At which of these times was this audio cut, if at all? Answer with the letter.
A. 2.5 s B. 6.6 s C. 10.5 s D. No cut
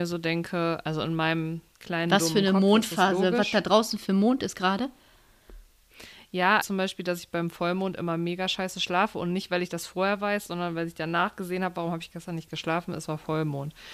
B